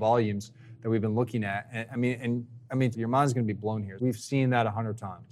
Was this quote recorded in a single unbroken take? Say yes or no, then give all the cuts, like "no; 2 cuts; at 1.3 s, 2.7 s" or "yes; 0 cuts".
no; 2 cuts; at 2.9 s, 4.0 s